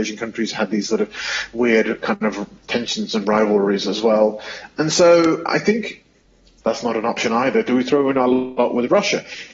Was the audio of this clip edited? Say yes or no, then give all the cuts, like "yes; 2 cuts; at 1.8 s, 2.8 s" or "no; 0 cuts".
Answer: yes; 1 cut; at 6.6 s